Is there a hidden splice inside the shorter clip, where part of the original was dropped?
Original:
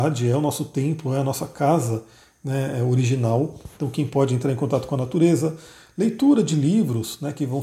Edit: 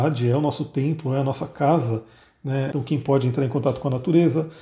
yes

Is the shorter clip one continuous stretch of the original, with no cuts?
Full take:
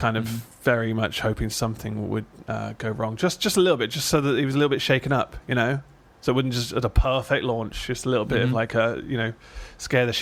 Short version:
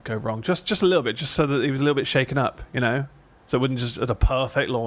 yes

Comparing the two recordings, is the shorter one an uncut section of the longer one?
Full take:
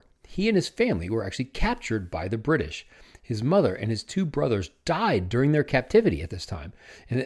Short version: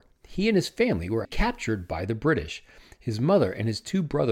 no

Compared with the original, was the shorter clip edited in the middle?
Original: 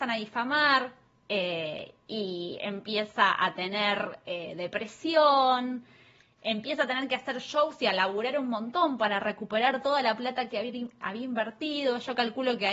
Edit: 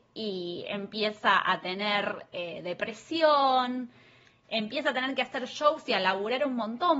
no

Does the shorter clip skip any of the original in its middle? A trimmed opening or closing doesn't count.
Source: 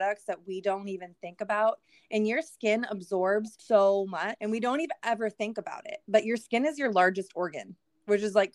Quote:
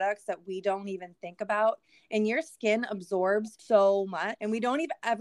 no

